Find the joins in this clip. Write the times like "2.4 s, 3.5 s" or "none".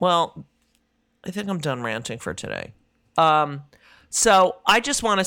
3.1 s

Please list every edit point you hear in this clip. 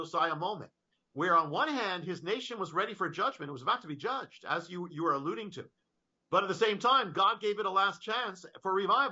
none

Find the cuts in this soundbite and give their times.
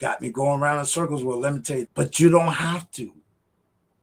1.9 s

